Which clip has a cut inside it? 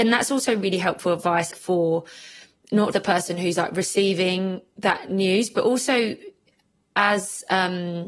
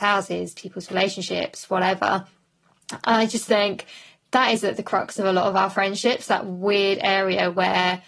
first; 2 cuts; at 1.5 s, 2.9 s

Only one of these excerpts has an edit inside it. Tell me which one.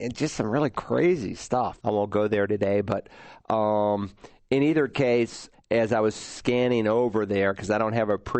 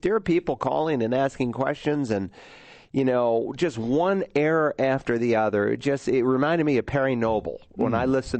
first; 2 cuts; at 1.8 s, 5.5 s

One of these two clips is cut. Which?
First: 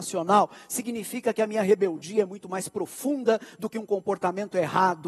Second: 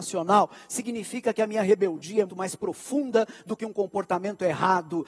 second; 1 cut; at 2.3 s

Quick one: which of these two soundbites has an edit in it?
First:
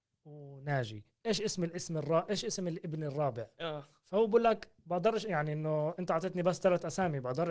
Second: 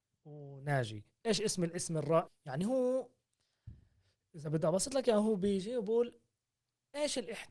second; 1 cut; at 2.3 s

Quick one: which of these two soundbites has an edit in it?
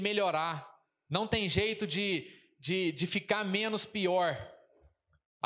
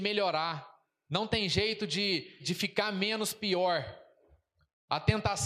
second; 1 cut; at 2.4 s

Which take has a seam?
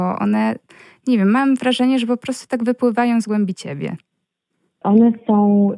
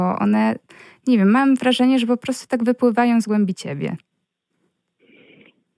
first; 1 cut; at 4.8 s

